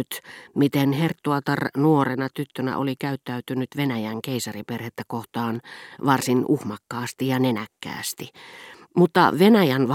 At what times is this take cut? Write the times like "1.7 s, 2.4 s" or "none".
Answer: 8.8 s